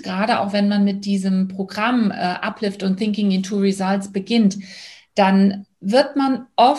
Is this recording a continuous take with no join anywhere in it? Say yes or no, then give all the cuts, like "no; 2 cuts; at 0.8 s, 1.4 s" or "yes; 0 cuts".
yes; 0 cuts